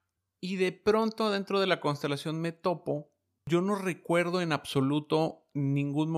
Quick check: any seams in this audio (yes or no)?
no